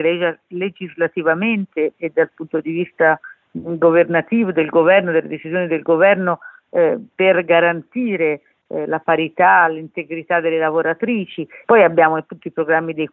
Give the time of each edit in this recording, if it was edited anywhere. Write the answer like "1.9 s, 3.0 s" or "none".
11.6 s